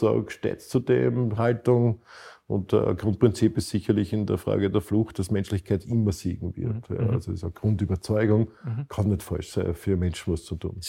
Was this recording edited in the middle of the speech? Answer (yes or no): yes